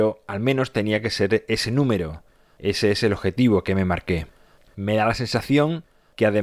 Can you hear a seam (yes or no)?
yes